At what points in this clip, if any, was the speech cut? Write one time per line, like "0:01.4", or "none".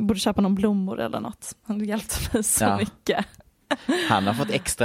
none